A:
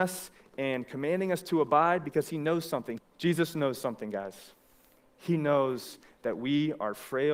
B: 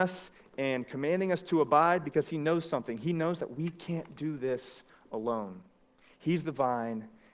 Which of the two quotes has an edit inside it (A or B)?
A